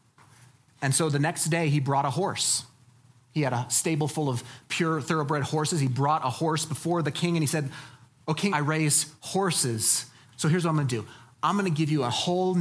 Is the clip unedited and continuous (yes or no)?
no